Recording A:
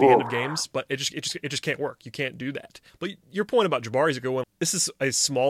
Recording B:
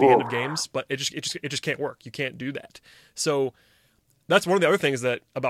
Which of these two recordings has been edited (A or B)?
A